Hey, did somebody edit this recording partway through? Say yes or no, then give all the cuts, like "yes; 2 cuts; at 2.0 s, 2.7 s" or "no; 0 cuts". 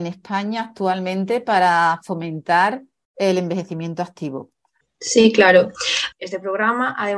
yes; 2 cuts; at 4.8 s, 6.1 s